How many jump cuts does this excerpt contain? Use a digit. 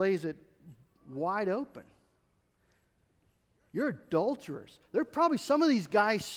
0